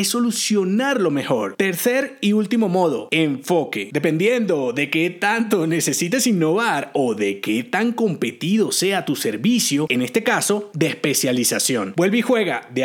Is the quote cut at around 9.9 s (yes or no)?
yes